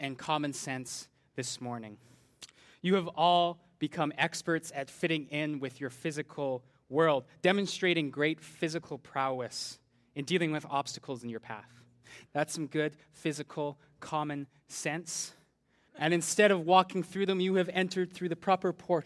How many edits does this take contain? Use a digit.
2